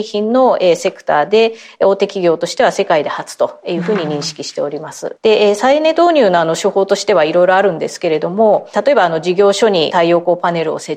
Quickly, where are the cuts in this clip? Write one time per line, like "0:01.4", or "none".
0:05.2